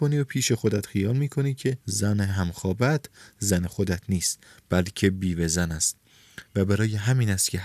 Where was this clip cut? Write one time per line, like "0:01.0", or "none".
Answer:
0:01.8